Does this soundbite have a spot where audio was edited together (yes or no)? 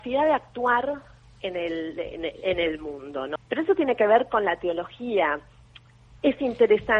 yes